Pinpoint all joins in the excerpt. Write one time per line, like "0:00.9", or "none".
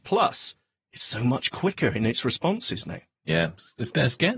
none